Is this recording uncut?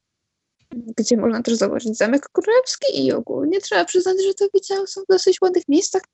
yes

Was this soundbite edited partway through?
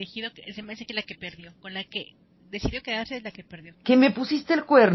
yes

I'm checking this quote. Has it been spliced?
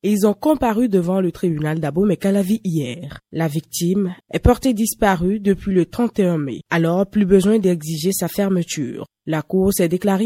yes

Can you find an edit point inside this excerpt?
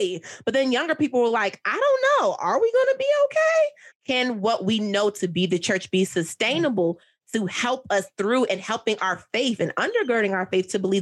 yes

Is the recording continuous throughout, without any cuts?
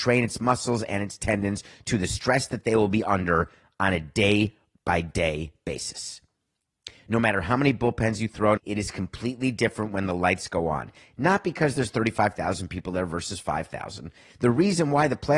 no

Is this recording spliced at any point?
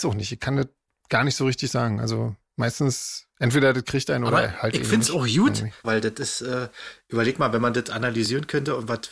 yes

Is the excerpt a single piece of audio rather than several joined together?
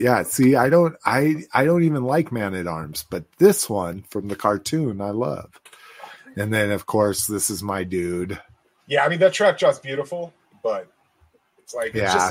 yes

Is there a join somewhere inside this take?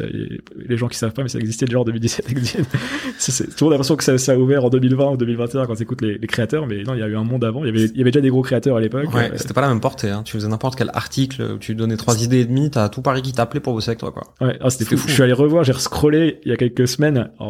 no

